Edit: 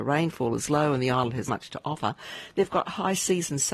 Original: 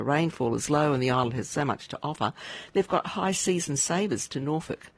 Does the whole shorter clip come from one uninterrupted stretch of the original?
no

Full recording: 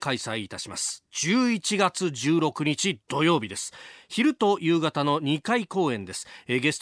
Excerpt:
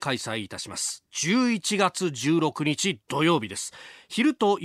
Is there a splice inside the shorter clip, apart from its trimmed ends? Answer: no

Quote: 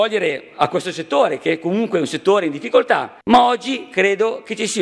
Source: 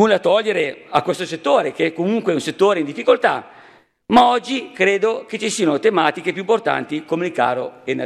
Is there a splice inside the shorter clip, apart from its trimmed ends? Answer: yes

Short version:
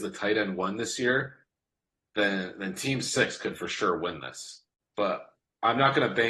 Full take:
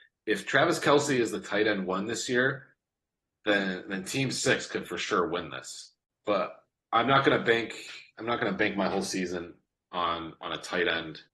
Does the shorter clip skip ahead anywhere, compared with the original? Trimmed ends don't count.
no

